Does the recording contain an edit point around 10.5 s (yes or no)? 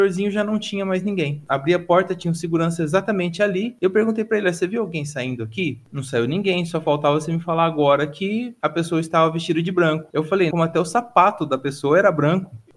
yes